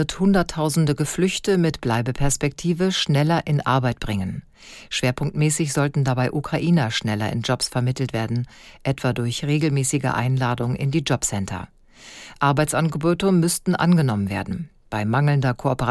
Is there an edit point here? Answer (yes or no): no